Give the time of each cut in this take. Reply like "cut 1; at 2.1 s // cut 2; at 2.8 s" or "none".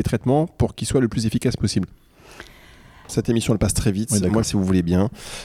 cut 1; at 3.1 s // cut 2; at 4.4 s

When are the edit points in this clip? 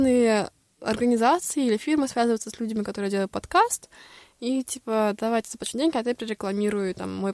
none

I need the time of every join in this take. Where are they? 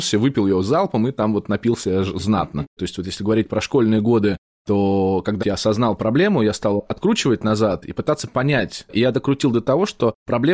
cut 1; at 2.8 s // cut 2; at 5.4 s // cut 3; at 8.9 s

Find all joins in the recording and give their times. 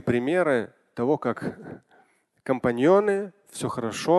none

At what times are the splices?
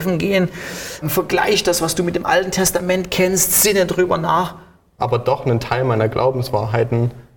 cut 1; at 1.0 s // cut 2; at 5.0 s

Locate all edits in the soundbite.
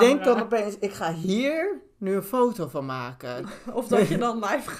cut 1; at 3.4 s

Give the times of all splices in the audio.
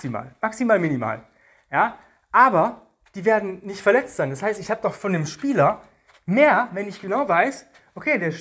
none

